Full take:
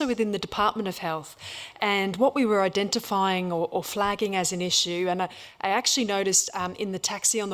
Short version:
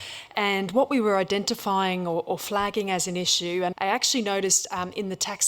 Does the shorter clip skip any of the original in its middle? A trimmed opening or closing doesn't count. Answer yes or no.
yes